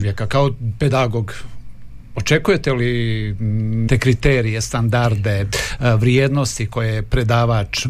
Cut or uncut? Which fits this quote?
cut